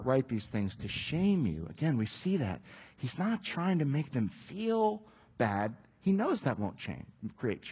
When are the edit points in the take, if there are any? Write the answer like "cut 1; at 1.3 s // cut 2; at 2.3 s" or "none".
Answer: none